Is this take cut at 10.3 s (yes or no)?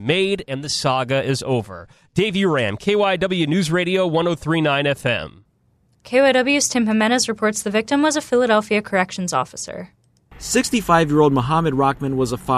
no